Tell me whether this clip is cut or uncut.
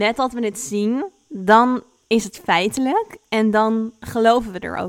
uncut